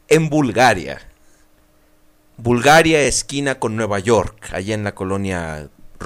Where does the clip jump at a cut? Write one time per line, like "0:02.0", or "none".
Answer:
none